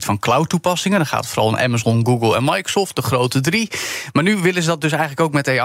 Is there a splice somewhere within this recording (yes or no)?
no